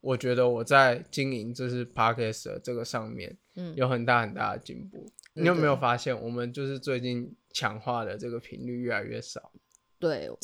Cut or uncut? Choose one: cut